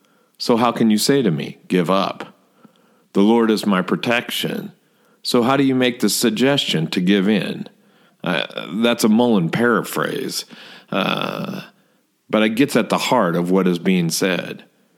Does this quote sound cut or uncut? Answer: uncut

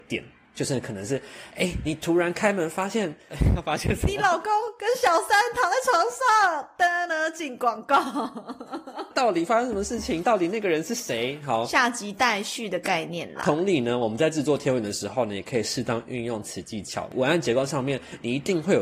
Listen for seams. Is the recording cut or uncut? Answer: uncut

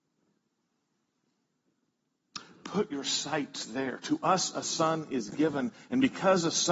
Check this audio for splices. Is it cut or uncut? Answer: uncut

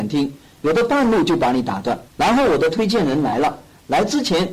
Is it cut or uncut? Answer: cut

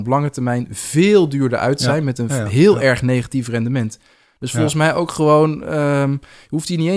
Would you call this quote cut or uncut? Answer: uncut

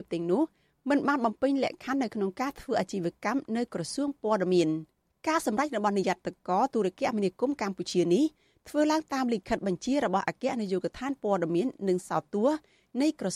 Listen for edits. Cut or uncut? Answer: uncut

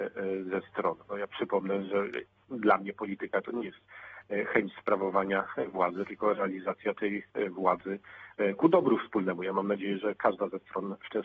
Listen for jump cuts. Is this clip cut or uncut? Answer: uncut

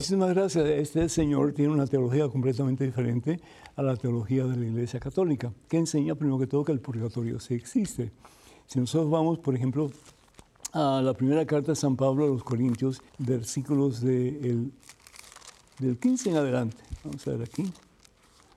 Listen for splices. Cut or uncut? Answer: cut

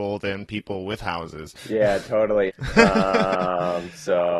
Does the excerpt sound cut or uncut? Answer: cut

